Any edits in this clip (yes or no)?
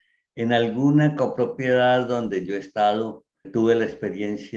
yes